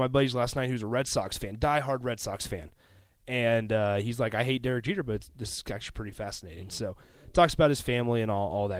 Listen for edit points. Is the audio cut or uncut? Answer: uncut